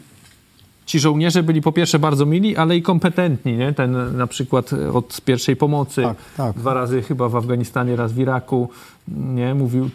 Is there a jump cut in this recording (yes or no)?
no